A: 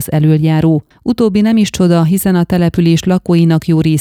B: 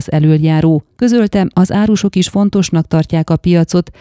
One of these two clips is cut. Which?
A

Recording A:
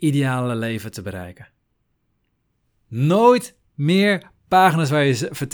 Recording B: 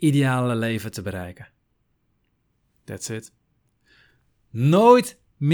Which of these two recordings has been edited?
A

